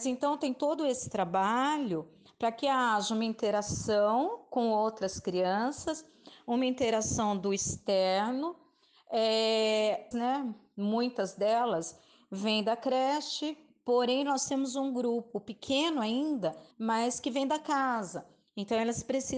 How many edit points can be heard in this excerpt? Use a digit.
2